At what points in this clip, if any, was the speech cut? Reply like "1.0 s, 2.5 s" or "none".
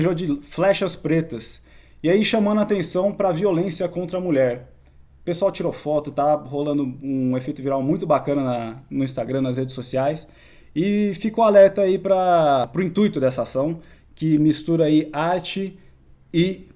none